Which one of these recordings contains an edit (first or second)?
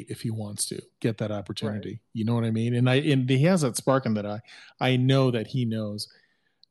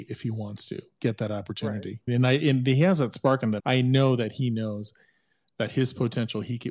second